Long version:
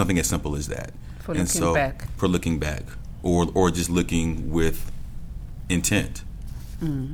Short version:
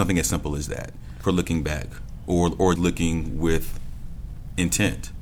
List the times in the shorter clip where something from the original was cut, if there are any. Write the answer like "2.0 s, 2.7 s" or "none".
1.2 s, 2.8 s